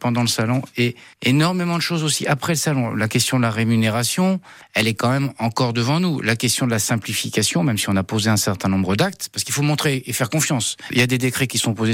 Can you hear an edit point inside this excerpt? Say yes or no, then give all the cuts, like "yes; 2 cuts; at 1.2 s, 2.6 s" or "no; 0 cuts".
no; 0 cuts